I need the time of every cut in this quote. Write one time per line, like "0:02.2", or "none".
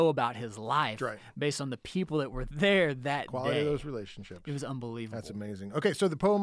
none

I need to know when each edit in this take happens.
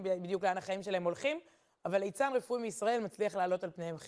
none

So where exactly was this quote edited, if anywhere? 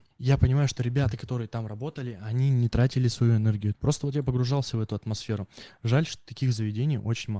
0:03.7

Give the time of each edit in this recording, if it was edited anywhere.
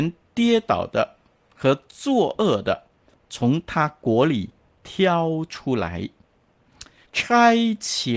0:07.0

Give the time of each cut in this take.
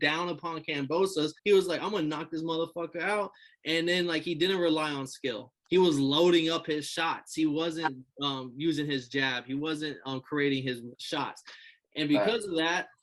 0:01.4
0:10.9

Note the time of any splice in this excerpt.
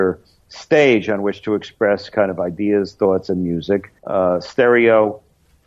0:04.0

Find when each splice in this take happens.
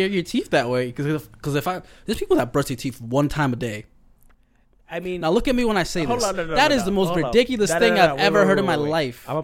none

